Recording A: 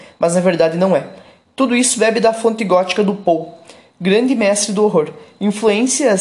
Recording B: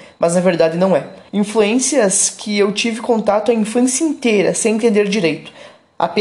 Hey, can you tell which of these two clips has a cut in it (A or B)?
B